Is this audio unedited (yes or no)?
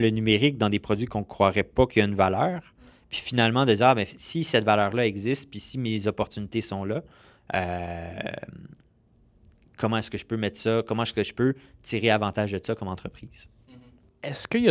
yes